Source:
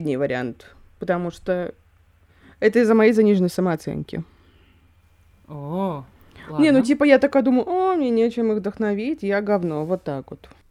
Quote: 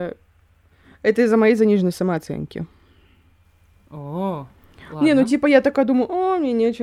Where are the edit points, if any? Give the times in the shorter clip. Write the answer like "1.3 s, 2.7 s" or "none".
none